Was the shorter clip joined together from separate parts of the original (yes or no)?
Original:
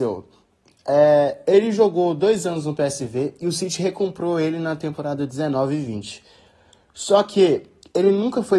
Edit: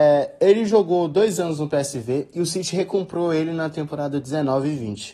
no